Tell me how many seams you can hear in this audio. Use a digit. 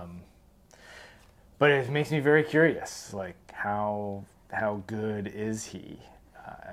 0